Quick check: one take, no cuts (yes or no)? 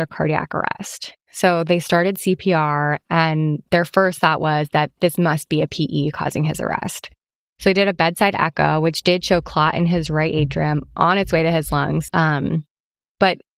no